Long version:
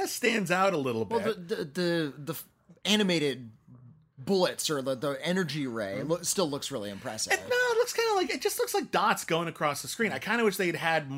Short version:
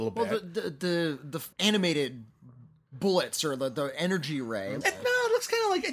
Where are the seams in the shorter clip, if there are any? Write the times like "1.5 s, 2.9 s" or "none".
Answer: 1.5 s, 4.8 s